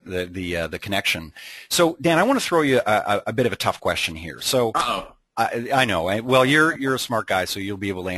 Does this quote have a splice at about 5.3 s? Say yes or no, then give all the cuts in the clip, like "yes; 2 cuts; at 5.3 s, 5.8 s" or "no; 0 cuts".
no; 1 cut; at 6.7 s